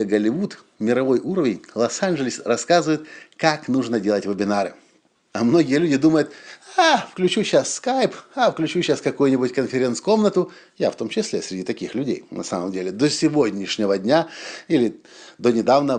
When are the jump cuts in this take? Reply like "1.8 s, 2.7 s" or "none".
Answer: 5.2 s